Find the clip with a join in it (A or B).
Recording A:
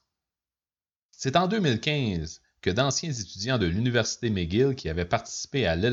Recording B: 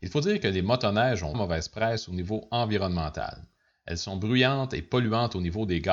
B